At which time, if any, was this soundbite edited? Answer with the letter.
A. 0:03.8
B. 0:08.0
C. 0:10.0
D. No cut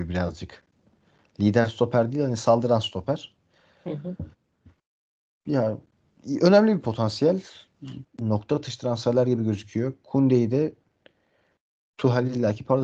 B